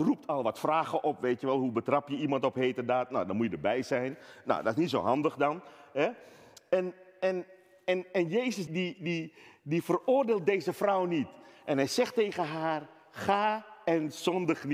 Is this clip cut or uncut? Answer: cut